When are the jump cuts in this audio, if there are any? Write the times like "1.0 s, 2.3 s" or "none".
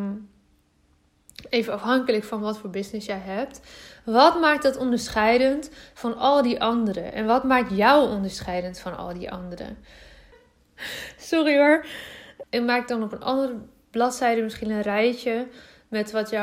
10.3 s, 12.4 s